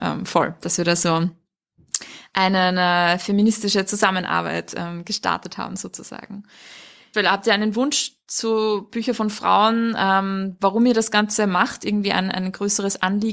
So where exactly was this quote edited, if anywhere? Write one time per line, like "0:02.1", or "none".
0:07.1